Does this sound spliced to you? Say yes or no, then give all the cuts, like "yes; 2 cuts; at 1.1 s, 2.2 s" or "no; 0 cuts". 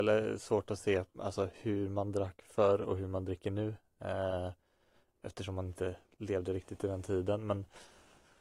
no; 0 cuts